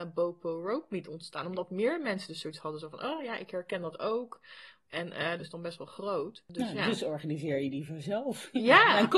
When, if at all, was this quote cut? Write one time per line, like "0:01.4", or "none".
0:05.4